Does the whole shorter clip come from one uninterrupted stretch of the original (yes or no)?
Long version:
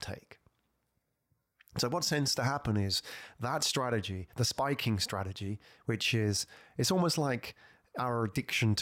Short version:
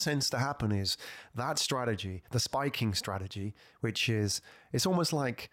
yes